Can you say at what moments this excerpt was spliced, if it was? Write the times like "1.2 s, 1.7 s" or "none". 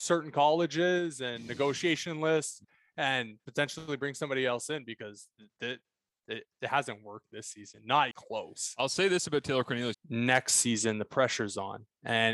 8.1 s, 9.9 s